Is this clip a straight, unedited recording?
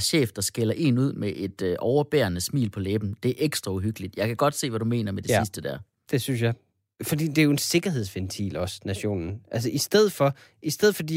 yes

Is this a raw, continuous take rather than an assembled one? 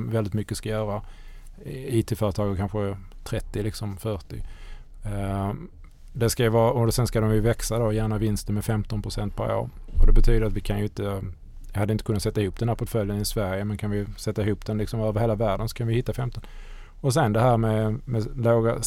yes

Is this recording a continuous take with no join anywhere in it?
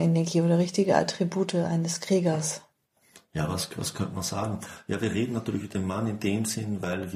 yes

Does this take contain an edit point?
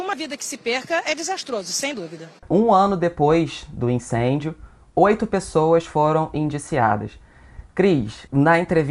yes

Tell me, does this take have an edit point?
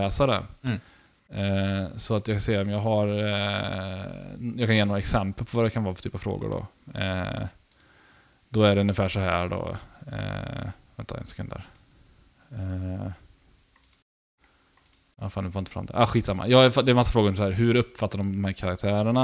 no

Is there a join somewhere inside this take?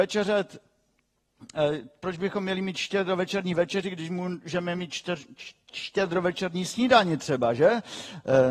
no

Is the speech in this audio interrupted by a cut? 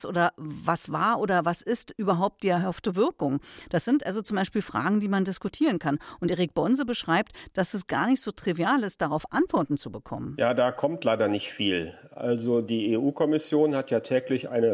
no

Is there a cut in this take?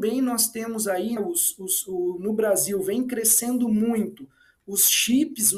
yes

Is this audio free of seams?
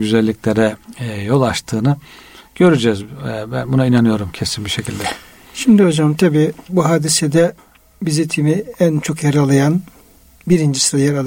yes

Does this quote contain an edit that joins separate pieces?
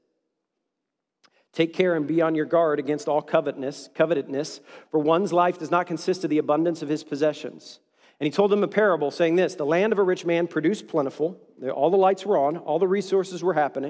no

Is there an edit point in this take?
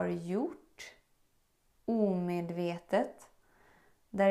no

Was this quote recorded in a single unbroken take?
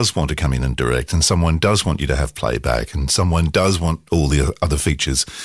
yes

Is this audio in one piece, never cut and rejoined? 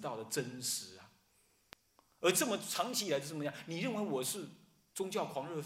yes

